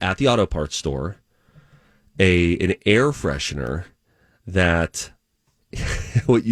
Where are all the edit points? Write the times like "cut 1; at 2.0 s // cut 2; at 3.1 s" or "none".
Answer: none